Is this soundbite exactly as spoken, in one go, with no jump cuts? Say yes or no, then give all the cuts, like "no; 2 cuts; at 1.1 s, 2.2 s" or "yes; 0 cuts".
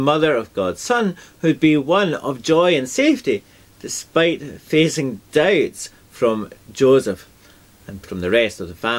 no; 1 cut; at 8.0 s